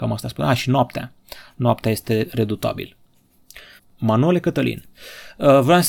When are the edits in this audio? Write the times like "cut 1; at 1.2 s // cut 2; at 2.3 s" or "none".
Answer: cut 1; at 3.8 s